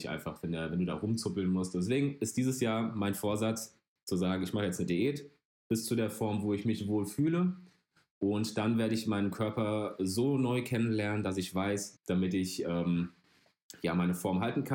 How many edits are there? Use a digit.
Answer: 1